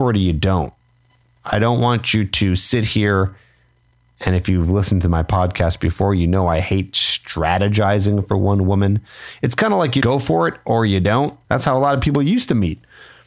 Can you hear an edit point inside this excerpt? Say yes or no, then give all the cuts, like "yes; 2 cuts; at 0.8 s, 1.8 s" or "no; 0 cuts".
yes; 2 cuts; at 10.0 s, 11.4 s